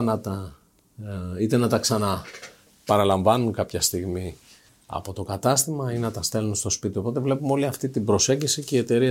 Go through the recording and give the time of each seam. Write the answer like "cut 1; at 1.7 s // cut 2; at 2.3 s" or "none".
none